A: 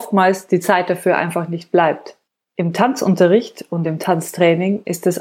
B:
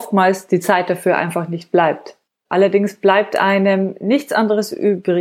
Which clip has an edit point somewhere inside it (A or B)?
B